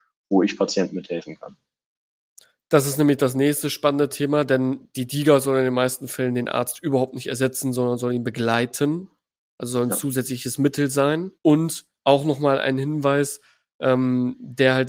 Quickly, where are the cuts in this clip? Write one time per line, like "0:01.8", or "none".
0:11.4